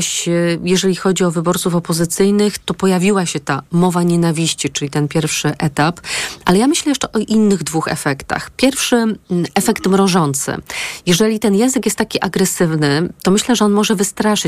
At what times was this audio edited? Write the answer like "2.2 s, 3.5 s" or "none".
2.6 s